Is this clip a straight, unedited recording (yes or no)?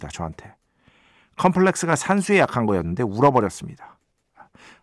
yes